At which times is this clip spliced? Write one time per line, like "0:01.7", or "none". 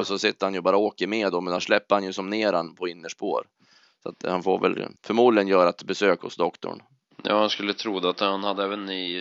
0:05.0